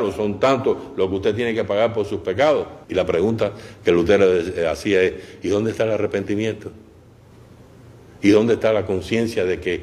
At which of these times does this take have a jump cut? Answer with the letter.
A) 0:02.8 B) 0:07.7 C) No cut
A